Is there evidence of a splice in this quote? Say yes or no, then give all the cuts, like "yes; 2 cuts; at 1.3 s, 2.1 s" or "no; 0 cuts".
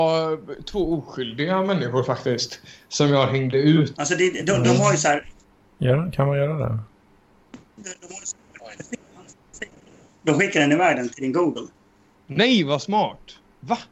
yes; 1 cut; at 3.9 s